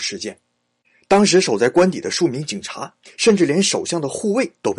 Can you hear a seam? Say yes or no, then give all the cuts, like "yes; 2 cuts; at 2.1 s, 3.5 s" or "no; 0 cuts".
no; 0 cuts